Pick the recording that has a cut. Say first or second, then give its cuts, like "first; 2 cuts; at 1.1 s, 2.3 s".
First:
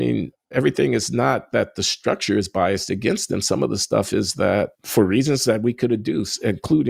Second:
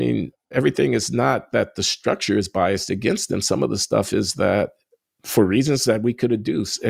first; 1 cut; at 4.7 s